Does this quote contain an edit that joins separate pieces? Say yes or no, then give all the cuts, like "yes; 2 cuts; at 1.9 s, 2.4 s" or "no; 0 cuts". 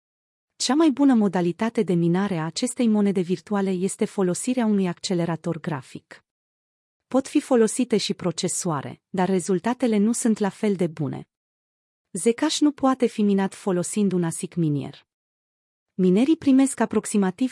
no; 0 cuts